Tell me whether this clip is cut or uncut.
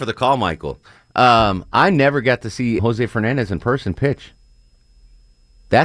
cut